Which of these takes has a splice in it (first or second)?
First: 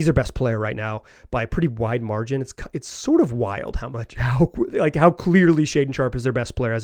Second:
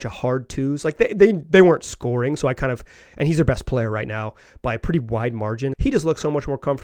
second